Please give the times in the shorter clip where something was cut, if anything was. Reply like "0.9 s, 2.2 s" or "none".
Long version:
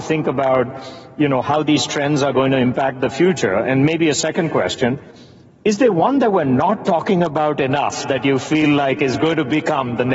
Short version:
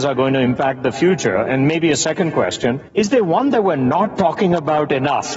2.9 s